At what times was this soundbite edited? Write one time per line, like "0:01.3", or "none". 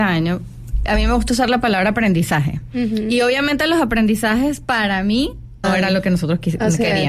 0:05.6